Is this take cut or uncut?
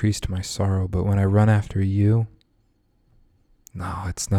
uncut